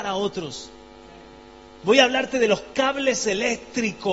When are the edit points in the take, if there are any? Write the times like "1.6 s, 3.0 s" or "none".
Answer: 1.8 s